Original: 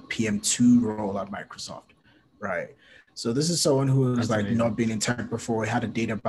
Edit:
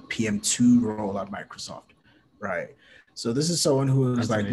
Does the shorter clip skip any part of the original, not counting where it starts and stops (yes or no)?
no